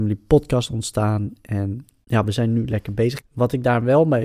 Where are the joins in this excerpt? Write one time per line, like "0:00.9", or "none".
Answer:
0:03.2